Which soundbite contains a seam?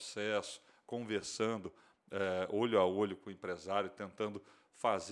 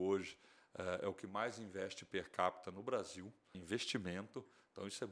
second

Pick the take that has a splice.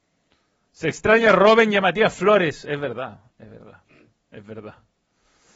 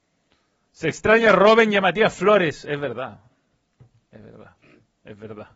first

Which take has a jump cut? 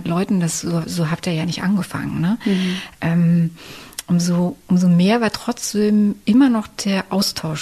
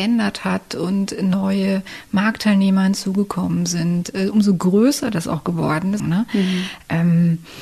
second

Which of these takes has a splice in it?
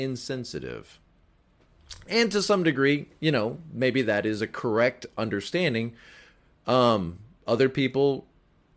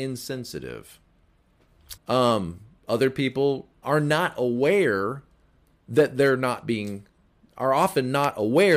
second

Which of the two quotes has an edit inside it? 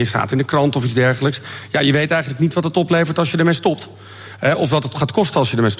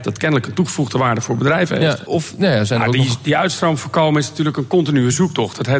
second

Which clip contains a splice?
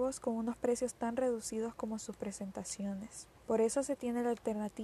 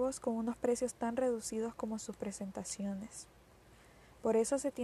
first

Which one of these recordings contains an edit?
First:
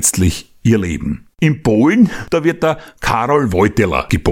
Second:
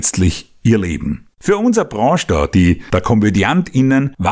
first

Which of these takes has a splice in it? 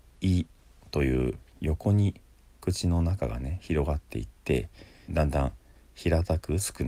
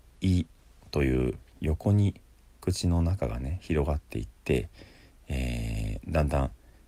first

